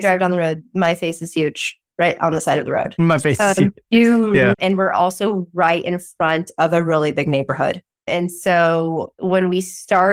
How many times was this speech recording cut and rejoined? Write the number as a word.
one